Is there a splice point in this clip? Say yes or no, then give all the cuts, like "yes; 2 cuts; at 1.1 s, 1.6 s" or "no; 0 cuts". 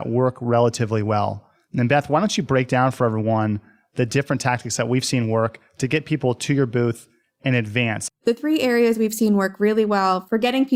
yes; 1 cut; at 8.1 s